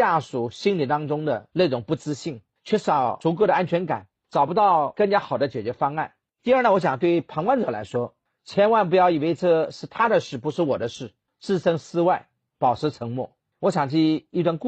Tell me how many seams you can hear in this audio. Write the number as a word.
one